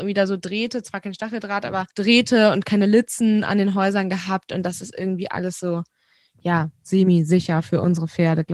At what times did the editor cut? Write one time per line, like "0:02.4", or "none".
0:01.9